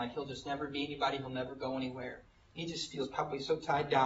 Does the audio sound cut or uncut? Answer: uncut